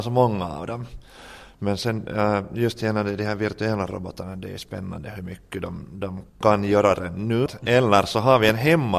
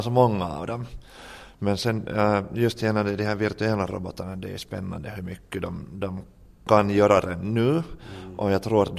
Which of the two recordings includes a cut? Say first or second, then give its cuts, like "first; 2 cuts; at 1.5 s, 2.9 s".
first; 2 cuts; at 6.3 s, 7.5 s